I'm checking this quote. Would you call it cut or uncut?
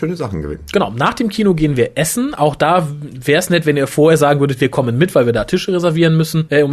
uncut